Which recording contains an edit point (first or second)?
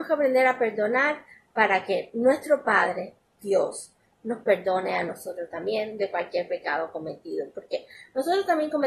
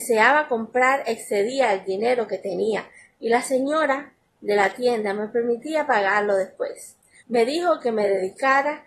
second